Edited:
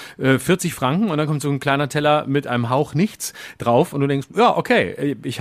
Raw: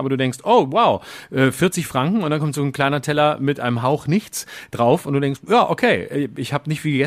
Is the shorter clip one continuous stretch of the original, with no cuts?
yes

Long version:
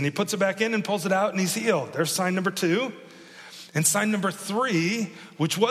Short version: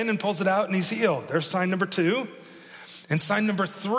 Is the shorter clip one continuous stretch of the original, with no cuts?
yes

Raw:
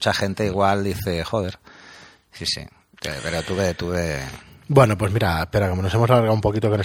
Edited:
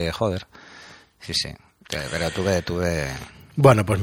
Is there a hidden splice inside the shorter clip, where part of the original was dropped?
no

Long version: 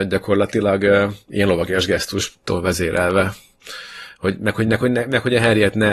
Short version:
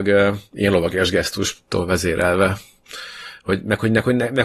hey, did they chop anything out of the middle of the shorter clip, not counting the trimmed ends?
no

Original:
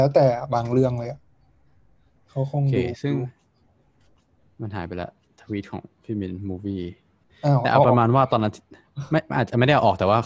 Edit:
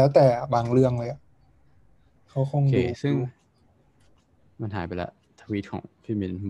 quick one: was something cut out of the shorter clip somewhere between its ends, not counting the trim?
no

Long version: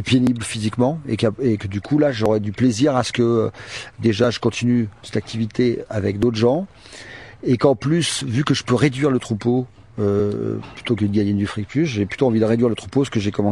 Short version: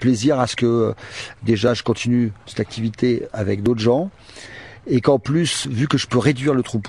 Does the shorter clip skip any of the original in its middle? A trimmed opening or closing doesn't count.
no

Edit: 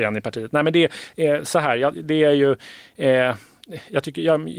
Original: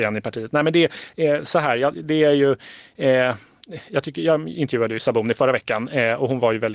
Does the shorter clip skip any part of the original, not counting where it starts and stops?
no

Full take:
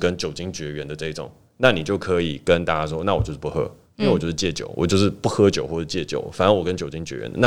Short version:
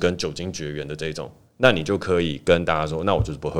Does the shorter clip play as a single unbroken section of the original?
yes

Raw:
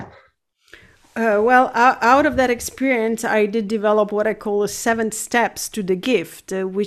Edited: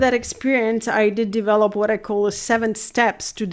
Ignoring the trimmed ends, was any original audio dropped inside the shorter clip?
no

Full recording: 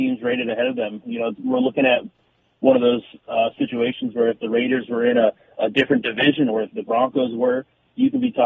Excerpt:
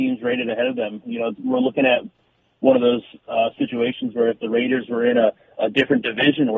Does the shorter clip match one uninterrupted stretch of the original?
yes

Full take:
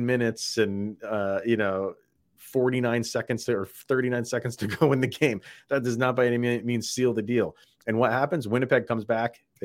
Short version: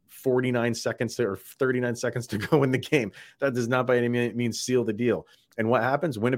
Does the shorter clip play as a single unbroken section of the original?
yes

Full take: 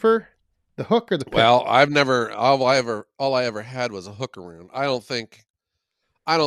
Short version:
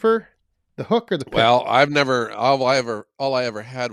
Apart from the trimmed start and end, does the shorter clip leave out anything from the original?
no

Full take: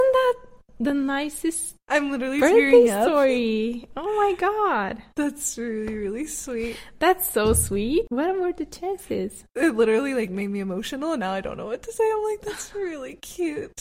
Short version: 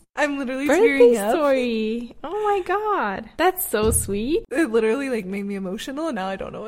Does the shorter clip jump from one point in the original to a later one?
yes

